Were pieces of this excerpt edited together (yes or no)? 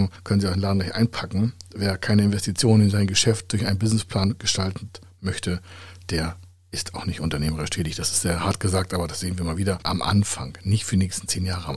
yes